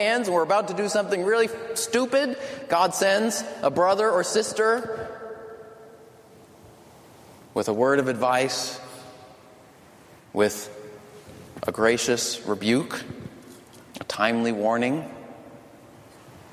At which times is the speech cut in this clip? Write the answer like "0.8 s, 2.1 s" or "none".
none